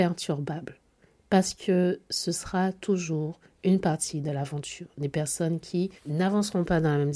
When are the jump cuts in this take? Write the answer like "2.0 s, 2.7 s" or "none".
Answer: 6.0 s